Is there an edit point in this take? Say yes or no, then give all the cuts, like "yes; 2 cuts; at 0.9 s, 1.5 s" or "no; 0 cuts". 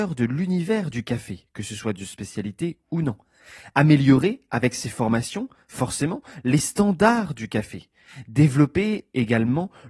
no; 0 cuts